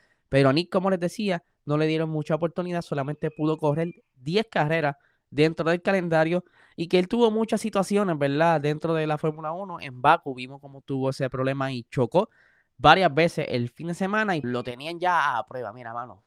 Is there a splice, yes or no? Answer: yes